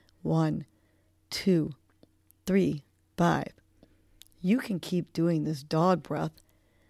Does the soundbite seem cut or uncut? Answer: cut